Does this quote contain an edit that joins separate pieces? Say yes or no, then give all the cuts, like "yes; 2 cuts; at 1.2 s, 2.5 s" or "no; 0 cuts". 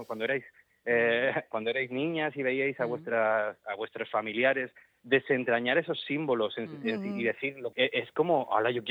yes; 1 cut; at 7.7 s